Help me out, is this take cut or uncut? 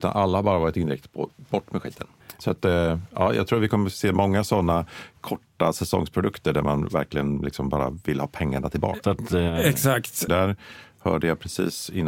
cut